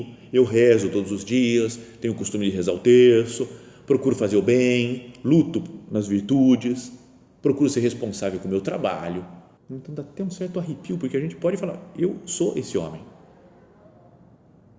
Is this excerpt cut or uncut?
cut